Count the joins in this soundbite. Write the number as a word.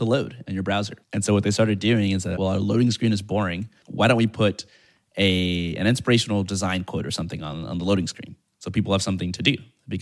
two